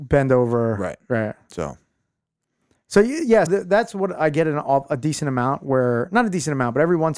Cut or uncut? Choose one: cut